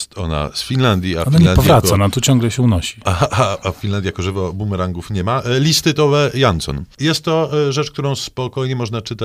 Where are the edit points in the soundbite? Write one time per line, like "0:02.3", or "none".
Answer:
none